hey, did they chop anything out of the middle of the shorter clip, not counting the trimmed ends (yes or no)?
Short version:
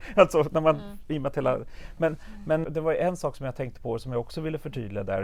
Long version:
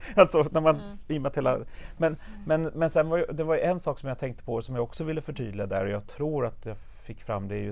yes